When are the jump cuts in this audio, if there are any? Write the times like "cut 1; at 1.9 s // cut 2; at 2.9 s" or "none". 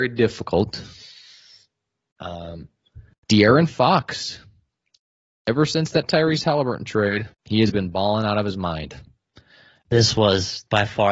cut 1; at 7.3 s // cut 2; at 9.8 s